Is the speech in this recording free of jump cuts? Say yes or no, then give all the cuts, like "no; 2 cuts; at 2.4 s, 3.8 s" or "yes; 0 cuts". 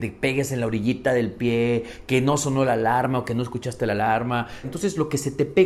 no; 1 cut; at 4.6 s